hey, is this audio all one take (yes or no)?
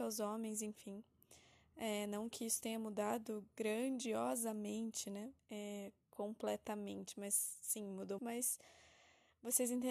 no